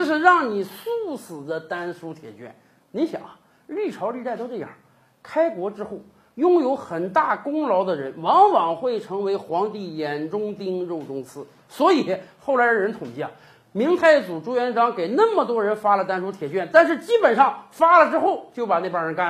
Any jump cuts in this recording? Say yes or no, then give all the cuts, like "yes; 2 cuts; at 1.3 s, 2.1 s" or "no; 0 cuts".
no; 0 cuts